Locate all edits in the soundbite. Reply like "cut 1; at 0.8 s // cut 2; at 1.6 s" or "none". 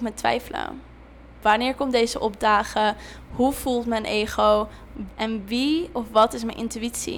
cut 1; at 1.4 s // cut 2; at 5.1 s

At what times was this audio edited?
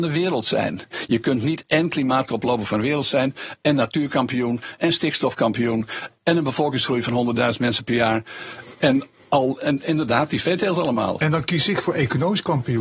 none

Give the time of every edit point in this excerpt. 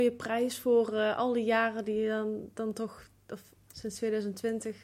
cut 1; at 3.7 s

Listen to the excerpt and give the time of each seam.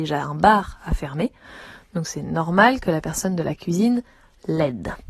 none

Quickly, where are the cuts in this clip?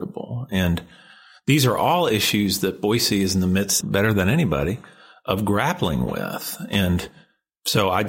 cut 1; at 3.8 s

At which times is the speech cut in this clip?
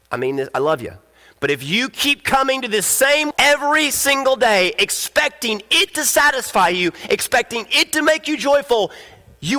cut 1; at 3.3 s

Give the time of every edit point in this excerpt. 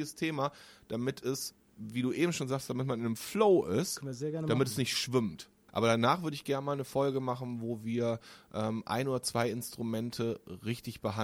cut 1; at 5.7 s

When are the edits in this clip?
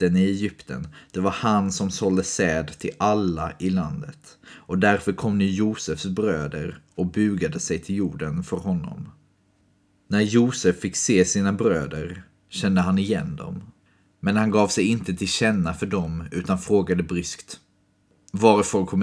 none

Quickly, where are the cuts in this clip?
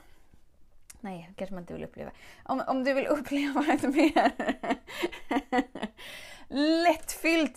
none

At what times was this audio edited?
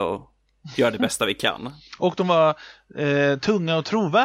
none

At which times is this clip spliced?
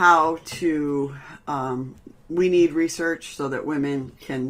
none

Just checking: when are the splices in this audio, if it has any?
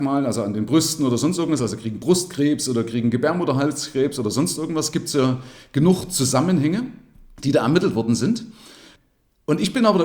none

